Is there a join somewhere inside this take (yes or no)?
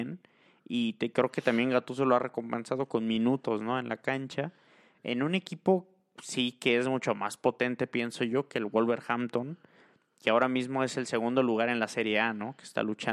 no